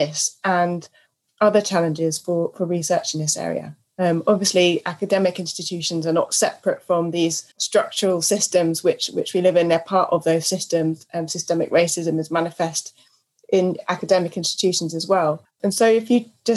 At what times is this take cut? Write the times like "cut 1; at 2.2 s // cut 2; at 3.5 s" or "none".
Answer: cut 1; at 7.5 s

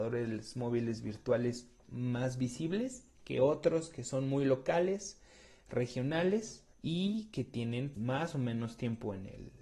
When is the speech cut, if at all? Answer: cut 1; at 1.8 s // cut 2; at 6.7 s // cut 3; at 7.9 s

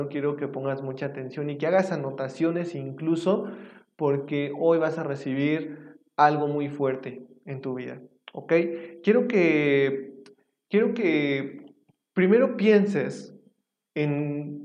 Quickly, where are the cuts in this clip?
none

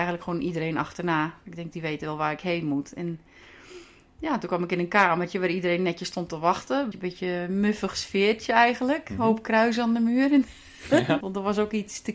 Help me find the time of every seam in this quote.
cut 1; at 6.9 s // cut 2; at 11.2 s

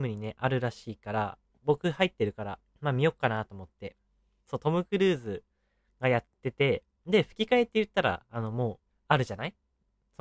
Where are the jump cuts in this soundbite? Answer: cut 1; at 4.4 s // cut 2; at 8.9 s

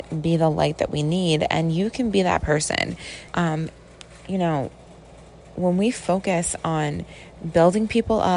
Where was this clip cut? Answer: cut 1; at 3.3 s

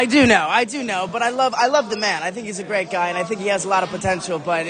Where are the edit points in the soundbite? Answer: none

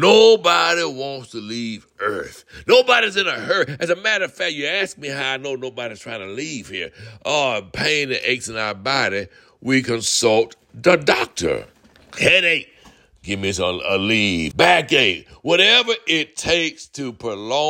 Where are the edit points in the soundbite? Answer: cut 1; at 14.5 s

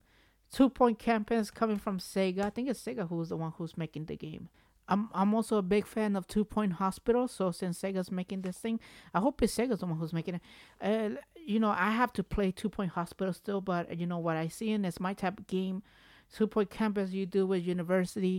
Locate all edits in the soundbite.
none

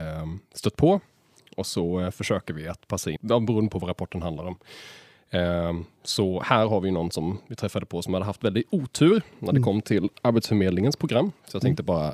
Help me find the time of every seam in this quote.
cut 1; at 3.2 s

